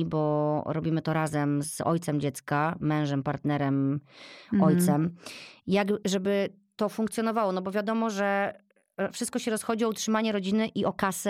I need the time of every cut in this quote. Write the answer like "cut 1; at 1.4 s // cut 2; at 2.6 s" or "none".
none

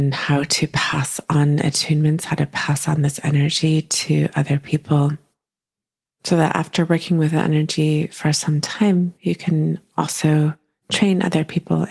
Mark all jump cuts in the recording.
none

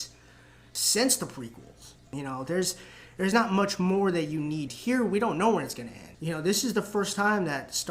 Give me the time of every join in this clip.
cut 1; at 2.0 s // cut 2; at 4.7 s // cut 3; at 6.1 s

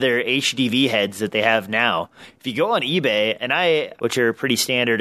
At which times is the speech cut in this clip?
cut 1; at 4.0 s

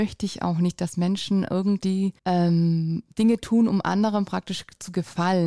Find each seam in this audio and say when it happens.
cut 1; at 2.2 s

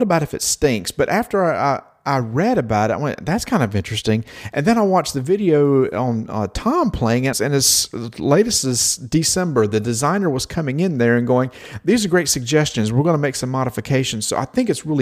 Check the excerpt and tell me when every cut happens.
cut 1; at 7.3 s

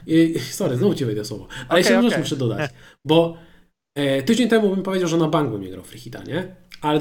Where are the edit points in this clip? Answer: none

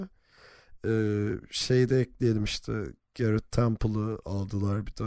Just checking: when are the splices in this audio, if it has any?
none

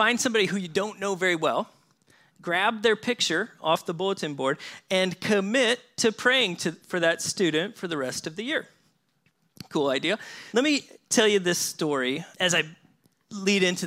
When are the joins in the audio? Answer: cut 1; at 10.5 s // cut 2; at 12.3 s

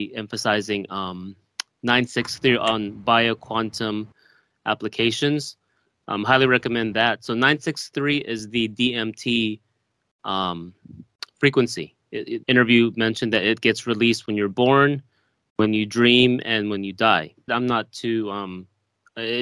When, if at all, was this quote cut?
cut 1; at 12.4 s // cut 2; at 17.5 s

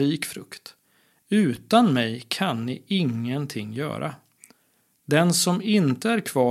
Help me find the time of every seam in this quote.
none

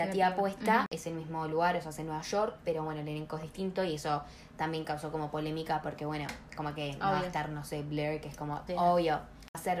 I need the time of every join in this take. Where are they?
cut 1; at 8.7 s

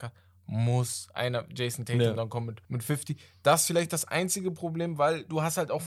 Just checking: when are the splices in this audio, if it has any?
cut 1; at 2.6 s

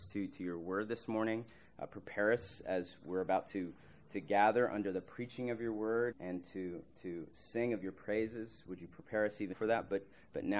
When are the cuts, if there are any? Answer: cut 1; at 6.1 s // cut 2; at 9.5 s

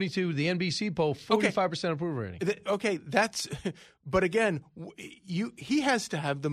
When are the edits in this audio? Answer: none

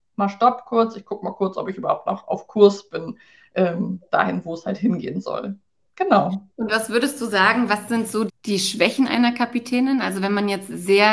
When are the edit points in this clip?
cut 1; at 8.3 s

